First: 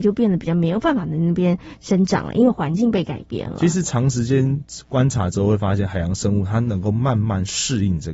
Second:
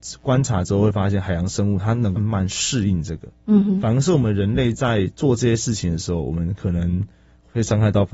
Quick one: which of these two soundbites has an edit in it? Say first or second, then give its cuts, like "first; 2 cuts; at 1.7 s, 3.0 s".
second; 1 cut; at 2.2 s